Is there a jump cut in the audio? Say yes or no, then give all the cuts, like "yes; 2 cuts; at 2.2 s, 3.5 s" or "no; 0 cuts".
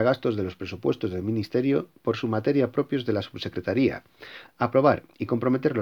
yes; 1 cut; at 4.5 s